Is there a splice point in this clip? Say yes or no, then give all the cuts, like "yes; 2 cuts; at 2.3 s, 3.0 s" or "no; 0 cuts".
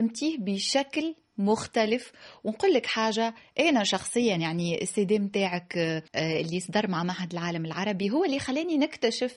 yes; 1 cut; at 6.1 s